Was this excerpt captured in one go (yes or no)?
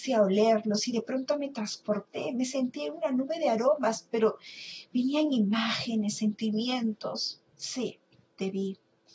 yes